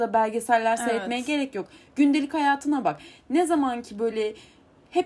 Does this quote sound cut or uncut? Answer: uncut